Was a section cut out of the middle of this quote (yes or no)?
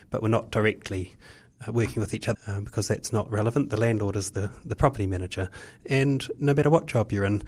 yes